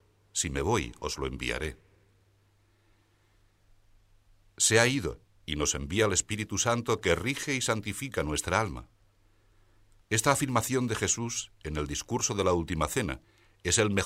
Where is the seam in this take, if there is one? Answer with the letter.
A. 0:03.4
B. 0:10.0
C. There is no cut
B